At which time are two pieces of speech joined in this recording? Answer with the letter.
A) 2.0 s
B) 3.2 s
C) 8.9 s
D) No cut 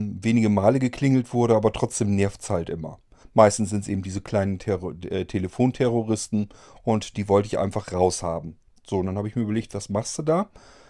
B